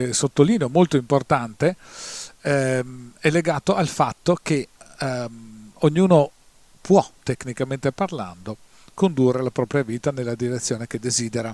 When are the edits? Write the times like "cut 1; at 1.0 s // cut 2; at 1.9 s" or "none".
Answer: none